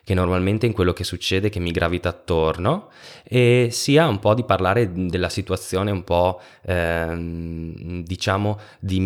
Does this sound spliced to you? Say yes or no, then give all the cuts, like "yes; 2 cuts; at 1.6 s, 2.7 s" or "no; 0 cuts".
no; 0 cuts